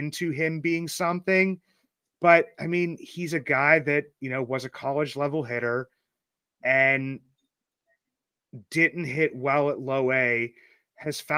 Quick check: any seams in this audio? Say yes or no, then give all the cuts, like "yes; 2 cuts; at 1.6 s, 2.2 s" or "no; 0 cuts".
no; 0 cuts